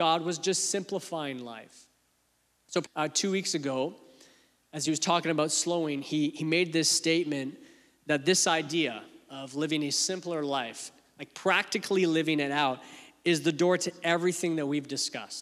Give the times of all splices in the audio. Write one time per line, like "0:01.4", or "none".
0:02.8